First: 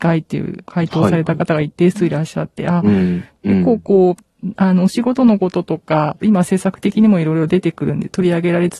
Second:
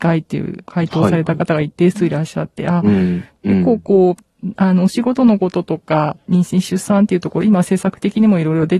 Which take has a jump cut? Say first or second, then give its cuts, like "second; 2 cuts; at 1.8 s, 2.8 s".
first; 1 cut; at 6.2 s